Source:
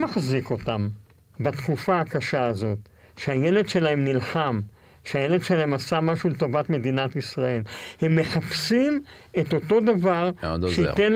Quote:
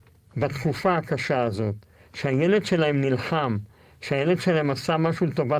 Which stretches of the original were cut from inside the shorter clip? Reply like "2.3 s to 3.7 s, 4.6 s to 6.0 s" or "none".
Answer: none